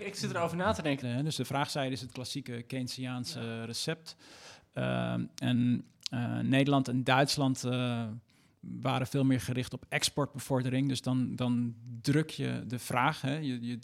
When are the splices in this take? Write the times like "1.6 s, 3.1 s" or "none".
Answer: 1.0 s